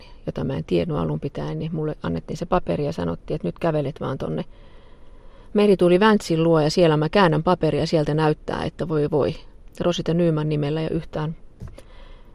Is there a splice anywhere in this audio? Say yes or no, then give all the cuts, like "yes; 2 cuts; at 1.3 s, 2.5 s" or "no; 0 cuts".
no; 0 cuts